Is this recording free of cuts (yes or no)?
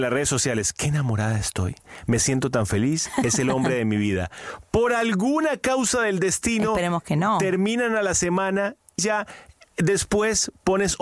no